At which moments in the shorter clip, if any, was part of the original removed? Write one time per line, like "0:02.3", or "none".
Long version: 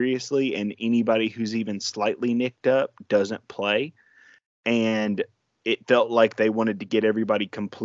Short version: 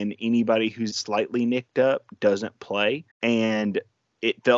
0:00.9
0:03.1